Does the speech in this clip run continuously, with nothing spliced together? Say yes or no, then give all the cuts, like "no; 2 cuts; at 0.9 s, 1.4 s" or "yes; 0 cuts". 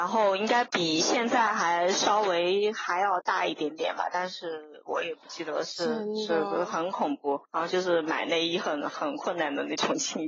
no; 1 cut; at 7.4 s